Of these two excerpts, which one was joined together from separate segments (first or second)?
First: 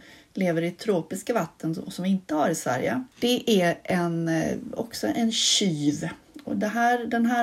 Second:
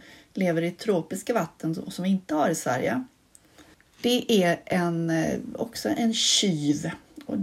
first